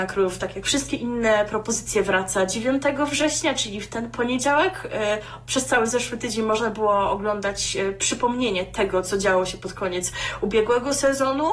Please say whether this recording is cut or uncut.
uncut